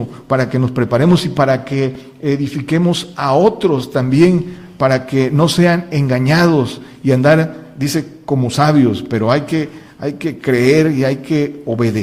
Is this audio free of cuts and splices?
yes; 0 cuts

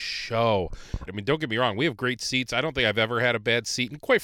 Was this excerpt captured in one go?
no; 1 cut; at 1.1 s

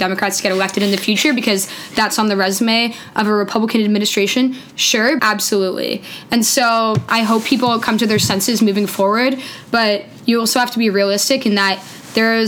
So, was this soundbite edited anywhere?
yes; 2 cuts; at 5.2 s, 7.1 s

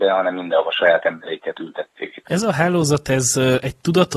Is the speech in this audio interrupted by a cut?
yes; 1 cut; at 2.2 s

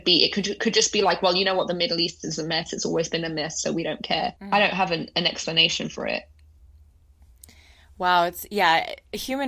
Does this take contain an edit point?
yes; 1 cut; at 4.4 s

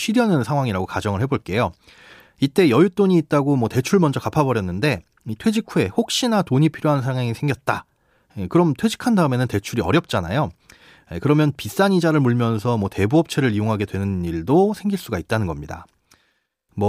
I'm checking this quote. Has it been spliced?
no; 0 cuts

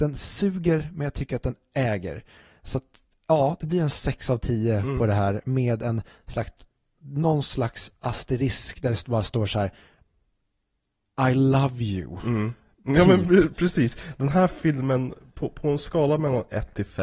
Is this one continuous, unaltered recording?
yes; 0 cuts

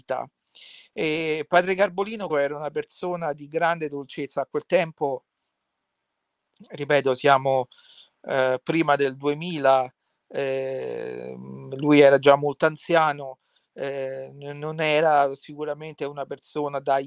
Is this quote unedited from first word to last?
no; 1 cut; at 2.3 s

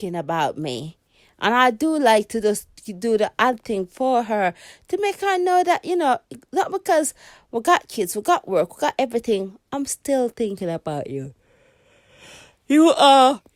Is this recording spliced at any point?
no; 0 cuts

